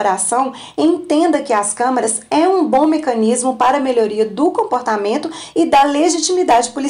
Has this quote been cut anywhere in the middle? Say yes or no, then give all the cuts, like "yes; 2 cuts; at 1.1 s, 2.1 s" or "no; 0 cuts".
no; 0 cuts